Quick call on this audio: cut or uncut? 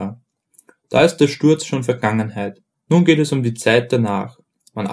cut